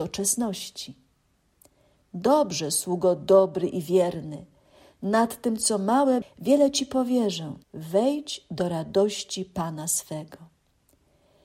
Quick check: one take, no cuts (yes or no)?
no